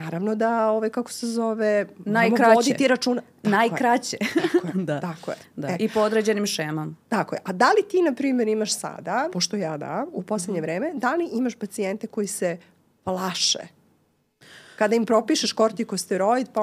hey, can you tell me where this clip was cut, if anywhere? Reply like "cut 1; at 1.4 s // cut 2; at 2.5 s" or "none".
cut 1; at 9.3 s